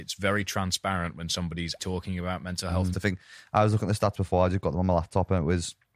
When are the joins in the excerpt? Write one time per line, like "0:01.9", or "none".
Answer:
0:01.8
0:02.9